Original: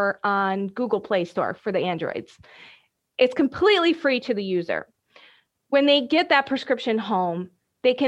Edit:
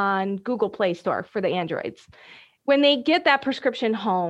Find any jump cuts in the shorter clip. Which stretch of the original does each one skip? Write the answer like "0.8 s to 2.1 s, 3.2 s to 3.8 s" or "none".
2.9 s to 5.6 s

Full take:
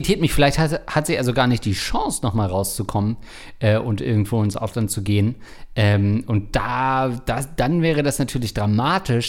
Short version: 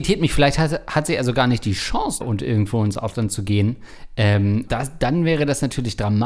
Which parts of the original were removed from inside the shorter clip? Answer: 2.2 s to 3.8 s, 6.3 s to 7.2 s

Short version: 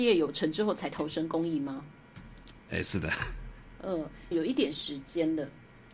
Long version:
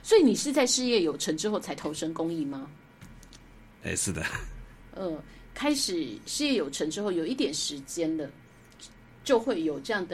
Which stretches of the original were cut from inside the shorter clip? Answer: 3.4 s to 3.7 s, 5.4 s to 7.1 s

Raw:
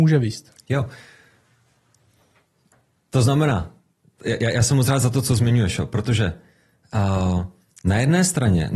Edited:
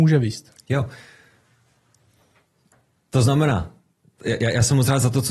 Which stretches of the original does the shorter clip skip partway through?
none

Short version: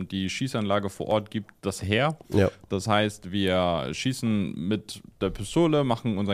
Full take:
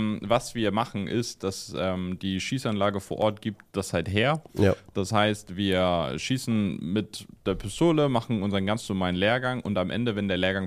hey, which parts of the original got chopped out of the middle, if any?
3.9 s to 4.0 s

